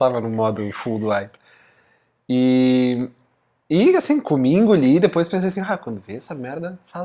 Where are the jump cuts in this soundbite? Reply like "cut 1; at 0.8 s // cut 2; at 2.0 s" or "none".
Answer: none